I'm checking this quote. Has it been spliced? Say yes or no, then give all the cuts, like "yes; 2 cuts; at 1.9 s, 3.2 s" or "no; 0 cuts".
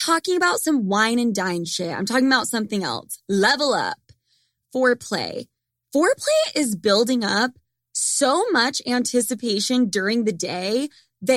no; 0 cuts